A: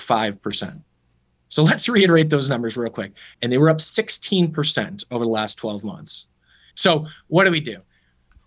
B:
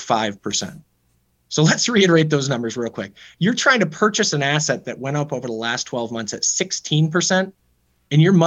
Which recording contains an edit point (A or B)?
A